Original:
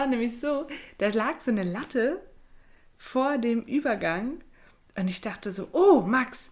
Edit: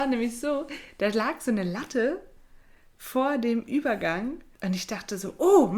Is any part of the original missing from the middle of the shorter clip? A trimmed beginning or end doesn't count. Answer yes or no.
yes